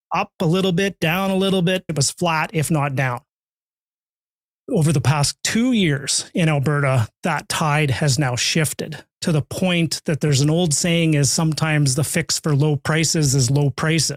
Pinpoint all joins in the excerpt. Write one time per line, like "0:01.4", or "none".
0:01.9